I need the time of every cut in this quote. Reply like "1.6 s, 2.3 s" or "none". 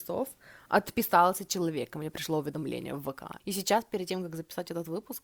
3.4 s